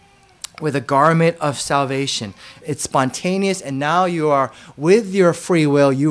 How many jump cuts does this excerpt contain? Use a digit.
1